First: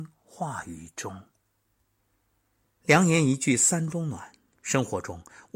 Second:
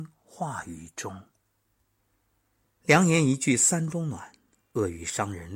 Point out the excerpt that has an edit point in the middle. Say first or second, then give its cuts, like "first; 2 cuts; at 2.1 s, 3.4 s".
first; 1 cut; at 4.5 s